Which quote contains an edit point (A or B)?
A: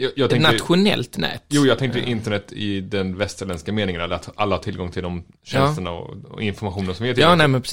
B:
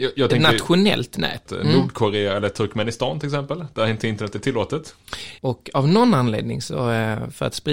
B